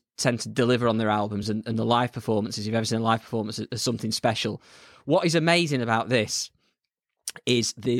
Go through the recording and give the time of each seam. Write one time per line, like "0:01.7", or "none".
none